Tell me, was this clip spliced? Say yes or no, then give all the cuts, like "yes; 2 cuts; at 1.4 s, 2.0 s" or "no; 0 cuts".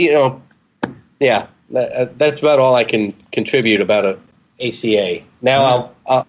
no; 0 cuts